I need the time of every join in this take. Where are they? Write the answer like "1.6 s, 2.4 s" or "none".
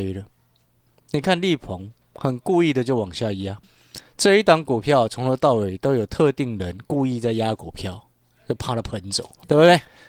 none